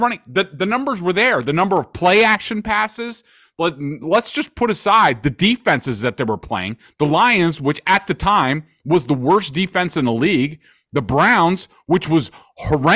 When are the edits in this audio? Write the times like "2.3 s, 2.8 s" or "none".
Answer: none